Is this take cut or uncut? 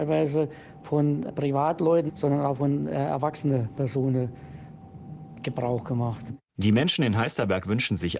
cut